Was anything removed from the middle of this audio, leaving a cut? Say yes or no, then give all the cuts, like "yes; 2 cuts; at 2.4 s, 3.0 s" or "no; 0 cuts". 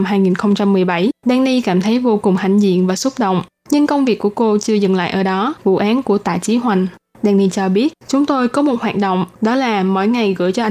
yes; 2 cuts; at 5.6 s, 7.1 s